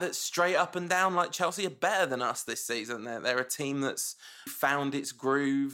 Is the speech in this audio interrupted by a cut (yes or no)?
yes